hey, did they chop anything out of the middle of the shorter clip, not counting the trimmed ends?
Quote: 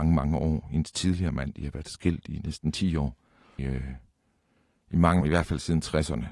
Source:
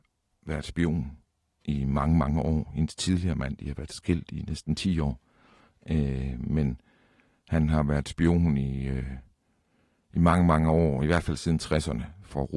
yes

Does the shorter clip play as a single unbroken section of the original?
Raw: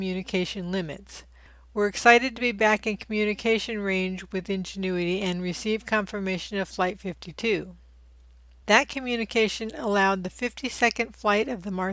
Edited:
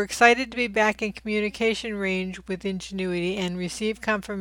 yes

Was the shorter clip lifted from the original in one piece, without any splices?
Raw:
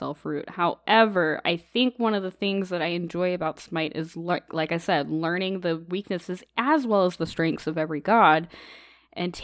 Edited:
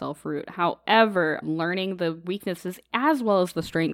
no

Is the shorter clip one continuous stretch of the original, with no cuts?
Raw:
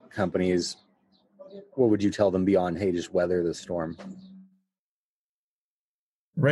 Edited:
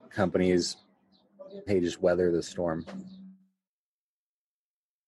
no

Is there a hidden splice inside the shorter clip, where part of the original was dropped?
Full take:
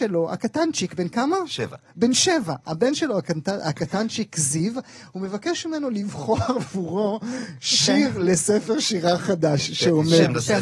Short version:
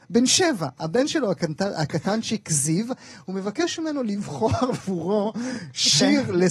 no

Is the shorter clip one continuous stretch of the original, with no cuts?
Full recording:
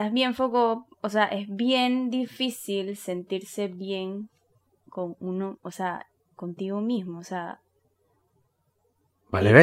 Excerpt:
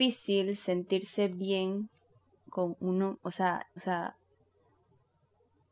no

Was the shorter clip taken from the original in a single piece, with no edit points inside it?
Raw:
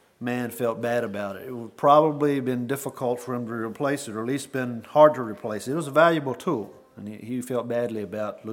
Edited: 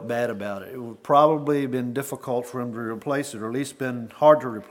yes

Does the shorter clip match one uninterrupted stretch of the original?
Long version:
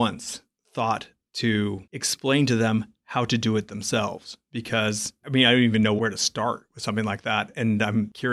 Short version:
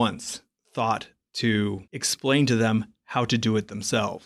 yes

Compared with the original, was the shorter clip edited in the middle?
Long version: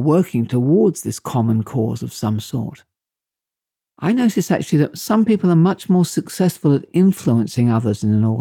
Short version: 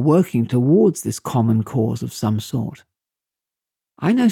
no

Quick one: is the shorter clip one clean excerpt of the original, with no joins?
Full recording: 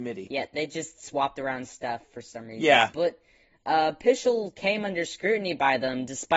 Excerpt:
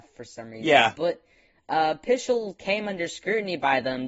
yes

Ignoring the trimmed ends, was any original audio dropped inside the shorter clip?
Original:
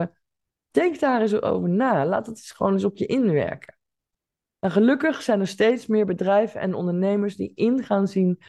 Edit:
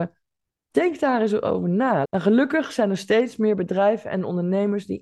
yes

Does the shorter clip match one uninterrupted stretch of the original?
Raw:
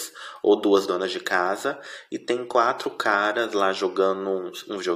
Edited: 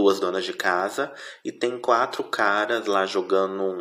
yes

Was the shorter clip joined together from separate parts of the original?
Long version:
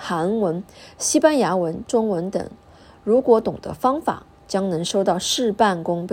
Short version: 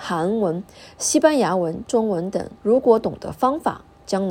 yes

